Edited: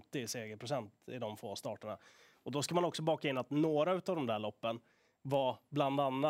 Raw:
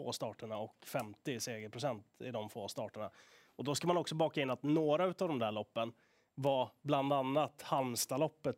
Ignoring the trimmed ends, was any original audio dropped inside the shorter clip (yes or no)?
no